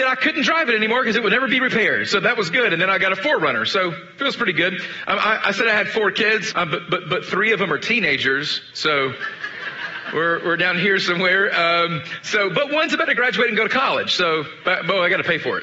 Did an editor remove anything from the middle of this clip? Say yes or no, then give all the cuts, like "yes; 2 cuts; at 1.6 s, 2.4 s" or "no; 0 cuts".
yes; 1 cut; at 6.5 s